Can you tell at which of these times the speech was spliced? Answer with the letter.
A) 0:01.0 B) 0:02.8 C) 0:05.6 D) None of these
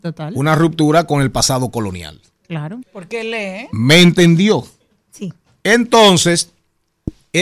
B